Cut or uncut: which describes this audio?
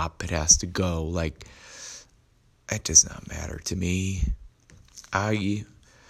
uncut